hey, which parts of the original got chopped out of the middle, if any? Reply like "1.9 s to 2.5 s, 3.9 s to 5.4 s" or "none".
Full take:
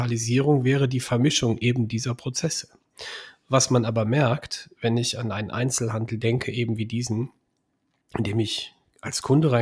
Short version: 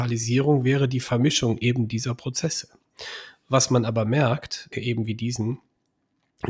4.7 s to 6.4 s